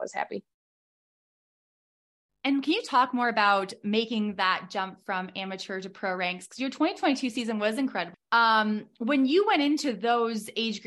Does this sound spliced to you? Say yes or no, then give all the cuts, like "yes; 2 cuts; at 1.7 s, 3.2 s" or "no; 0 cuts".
yes; 1 cut; at 8.1 s